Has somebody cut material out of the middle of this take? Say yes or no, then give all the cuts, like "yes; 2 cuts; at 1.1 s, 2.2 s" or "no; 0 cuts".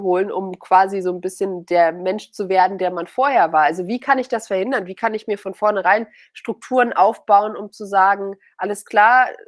no; 0 cuts